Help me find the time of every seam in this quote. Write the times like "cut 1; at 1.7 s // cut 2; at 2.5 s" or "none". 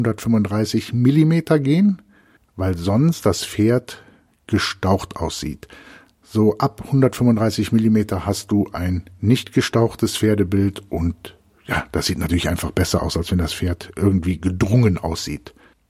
none